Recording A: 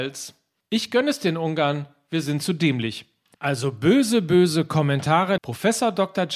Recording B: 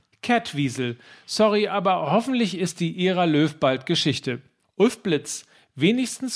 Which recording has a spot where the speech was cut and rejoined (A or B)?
A